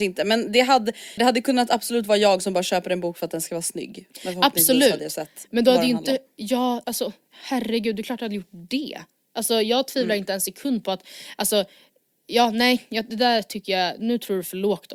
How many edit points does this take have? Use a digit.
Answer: 2